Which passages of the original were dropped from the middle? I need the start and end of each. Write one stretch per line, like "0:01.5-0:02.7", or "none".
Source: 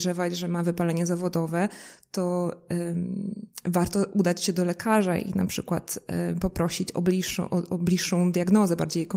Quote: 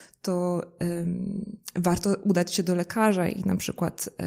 none

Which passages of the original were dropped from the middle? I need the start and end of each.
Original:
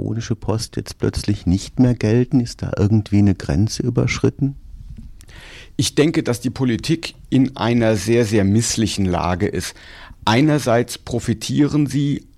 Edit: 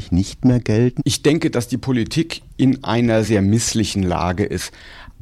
0:02.3-0:05.7
0:08.0-0:08.3

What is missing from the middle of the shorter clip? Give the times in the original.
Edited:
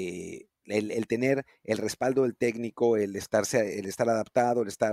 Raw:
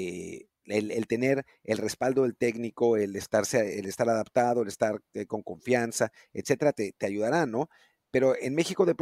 none

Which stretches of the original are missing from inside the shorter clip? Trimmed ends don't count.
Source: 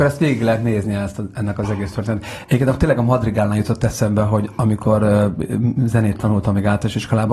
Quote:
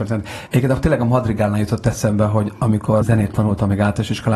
0:05.0-0:05.9

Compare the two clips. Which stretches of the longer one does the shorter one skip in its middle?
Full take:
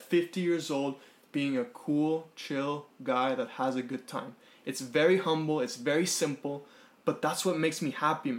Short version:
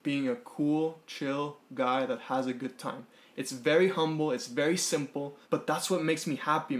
0:06.7-0:07.0

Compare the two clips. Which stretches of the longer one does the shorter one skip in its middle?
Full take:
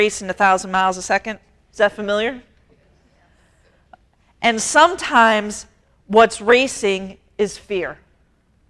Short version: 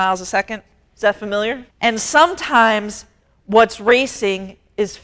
0:02.5-0:04.3

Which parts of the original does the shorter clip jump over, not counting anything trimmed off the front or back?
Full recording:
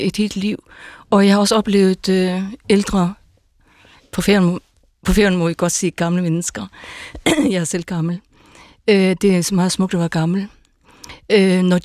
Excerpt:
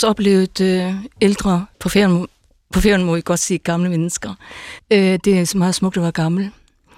0:03.2-0:04.1
0:07.1-0:08.8

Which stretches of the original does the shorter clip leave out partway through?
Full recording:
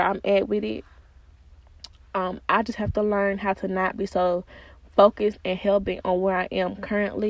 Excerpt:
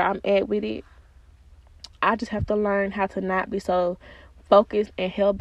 0:02.0-0:02.5

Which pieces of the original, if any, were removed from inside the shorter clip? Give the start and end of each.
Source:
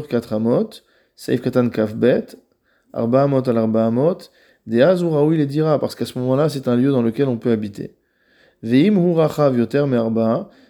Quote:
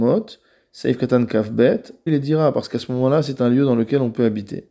0:02.5-0:05.3

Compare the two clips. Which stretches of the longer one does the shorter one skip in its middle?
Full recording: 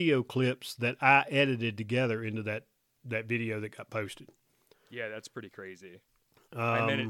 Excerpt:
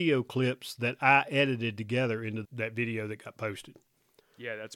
0:02.4-0:03.0

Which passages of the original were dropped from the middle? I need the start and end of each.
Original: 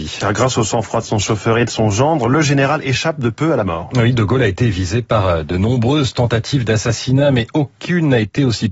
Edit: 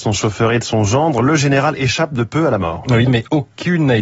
0:04.1-0:07.3

